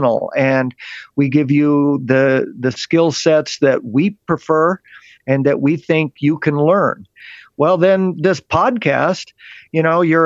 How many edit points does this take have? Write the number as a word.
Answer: zero